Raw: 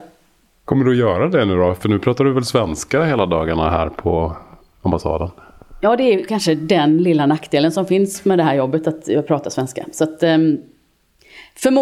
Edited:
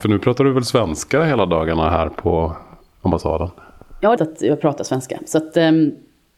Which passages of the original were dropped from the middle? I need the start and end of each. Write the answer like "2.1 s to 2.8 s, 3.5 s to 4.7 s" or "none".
6.0 s to 8.8 s